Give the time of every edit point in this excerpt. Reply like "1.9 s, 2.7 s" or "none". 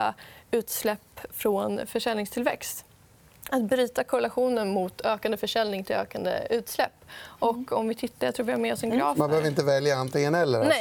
none